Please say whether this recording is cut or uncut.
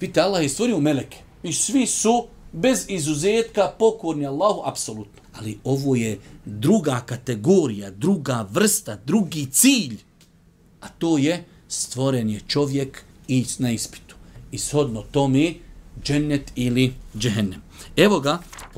cut